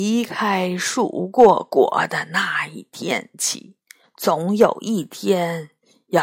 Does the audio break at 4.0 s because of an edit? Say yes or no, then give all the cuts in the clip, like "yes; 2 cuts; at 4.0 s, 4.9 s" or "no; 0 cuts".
yes; 1 cut; at 4.0 s